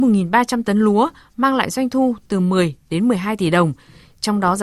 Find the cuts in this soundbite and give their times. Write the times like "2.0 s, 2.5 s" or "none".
none